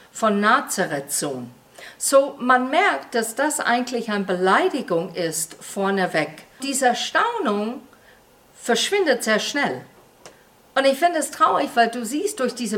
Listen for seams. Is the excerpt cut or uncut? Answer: cut